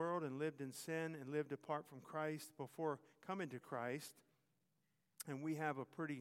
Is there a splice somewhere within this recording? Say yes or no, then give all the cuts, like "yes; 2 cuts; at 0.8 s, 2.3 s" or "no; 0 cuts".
no; 0 cuts